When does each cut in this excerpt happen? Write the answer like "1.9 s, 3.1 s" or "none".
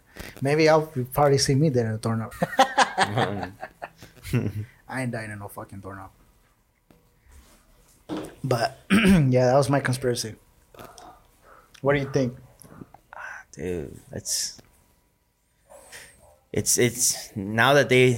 2.3 s